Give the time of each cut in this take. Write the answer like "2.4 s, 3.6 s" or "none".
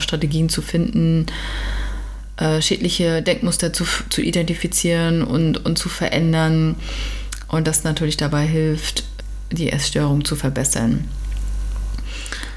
none